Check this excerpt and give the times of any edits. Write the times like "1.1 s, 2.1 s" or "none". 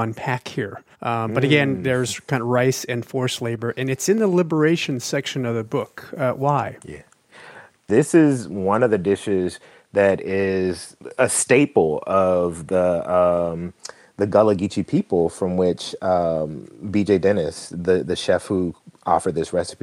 0.9 s